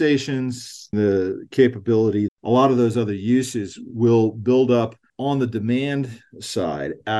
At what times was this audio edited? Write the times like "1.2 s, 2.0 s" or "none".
0.9 s, 2.3 s